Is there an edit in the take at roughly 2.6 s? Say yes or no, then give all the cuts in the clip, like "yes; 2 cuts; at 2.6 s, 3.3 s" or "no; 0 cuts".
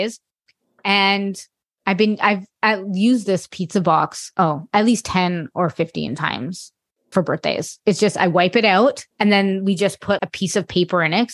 no; 3 cuts; at 7.1 s, 9.1 s, 10.2 s